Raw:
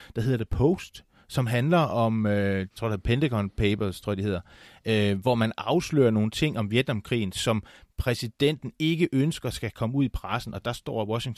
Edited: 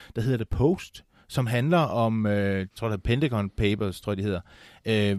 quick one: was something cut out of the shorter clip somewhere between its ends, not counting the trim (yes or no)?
no